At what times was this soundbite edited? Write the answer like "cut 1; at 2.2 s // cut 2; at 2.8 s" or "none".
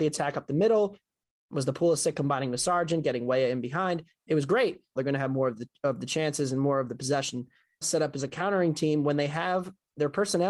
cut 1; at 5.0 s // cut 2; at 7.8 s